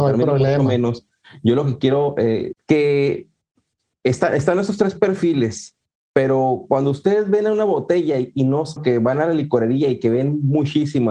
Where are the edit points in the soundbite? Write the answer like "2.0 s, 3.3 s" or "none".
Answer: 2.5 s, 8.8 s